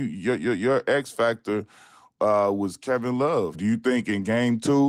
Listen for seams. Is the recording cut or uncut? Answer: cut